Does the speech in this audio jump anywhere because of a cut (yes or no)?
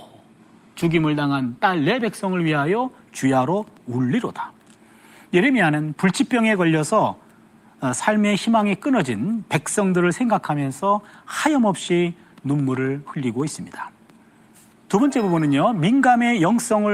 no